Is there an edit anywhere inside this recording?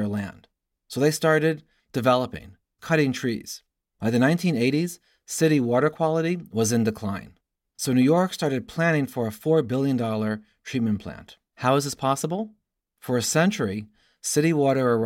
yes; 2 cuts; at 2.8 s, 11.5 s

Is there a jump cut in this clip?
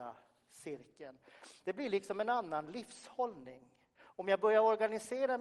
no; 0 cuts

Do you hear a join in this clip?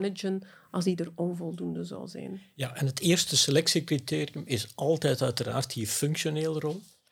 no; 0 cuts

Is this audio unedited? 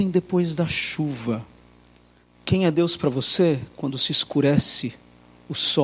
no; 1 cut; at 2.2 s

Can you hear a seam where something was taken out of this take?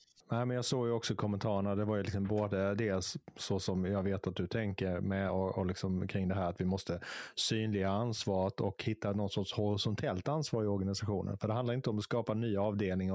no; 0 cuts

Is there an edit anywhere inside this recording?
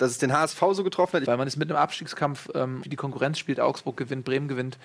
yes; 2 cuts; at 1.2 s, 2.8 s

